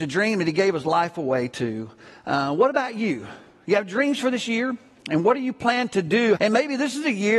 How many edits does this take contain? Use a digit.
1